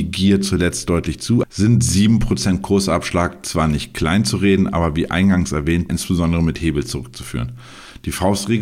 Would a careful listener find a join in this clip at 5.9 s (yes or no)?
yes